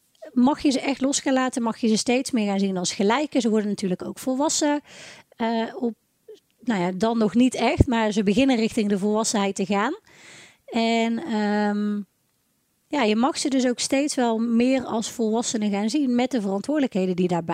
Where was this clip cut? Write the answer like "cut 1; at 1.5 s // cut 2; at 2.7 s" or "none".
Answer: none